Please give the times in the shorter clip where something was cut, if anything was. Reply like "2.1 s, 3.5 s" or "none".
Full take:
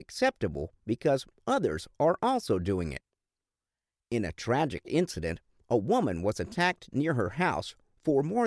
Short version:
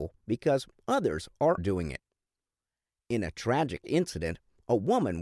1.6 s